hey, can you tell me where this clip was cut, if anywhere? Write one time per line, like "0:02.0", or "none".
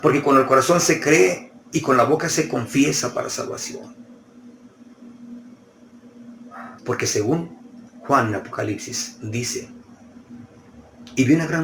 0:06.8